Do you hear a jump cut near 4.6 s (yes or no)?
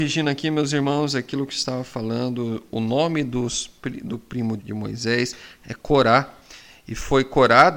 yes